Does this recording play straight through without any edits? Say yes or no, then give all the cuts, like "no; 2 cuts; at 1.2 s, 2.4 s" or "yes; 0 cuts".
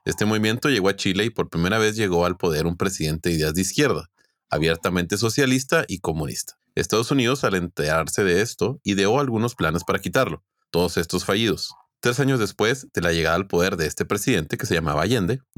yes; 0 cuts